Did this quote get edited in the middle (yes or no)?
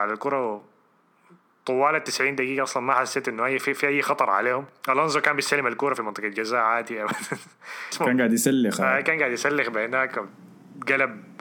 no